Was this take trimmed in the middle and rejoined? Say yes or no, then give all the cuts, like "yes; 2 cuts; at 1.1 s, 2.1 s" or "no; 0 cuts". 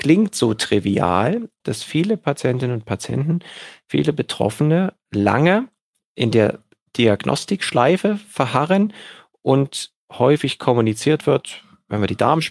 yes; 1 cut; at 1.6 s